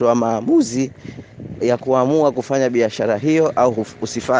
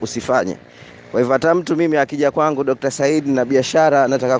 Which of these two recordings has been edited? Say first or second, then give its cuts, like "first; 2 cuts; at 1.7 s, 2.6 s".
first; 1 cut; at 1.6 s